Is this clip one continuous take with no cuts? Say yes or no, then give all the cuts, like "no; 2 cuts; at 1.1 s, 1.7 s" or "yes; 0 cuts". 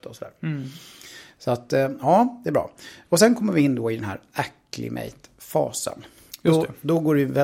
yes; 0 cuts